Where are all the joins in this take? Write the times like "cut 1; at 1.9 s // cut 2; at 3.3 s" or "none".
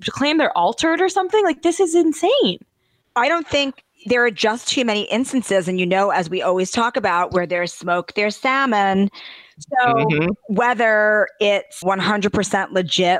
cut 1; at 11.8 s